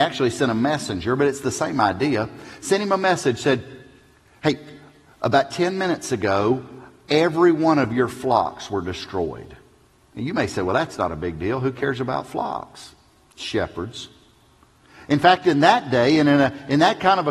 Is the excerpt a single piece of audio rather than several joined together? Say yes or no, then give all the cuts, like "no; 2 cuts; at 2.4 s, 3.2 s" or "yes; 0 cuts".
yes; 0 cuts